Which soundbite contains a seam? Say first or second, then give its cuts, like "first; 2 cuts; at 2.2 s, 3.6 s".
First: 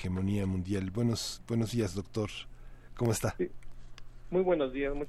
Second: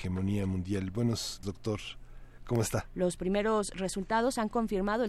second; 2 cuts; at 1.4 s, 2.9 s